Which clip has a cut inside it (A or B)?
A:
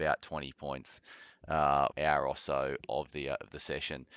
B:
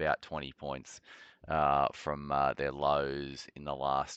A